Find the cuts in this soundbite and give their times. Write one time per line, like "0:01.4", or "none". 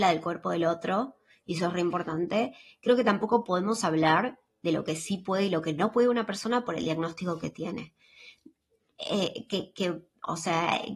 none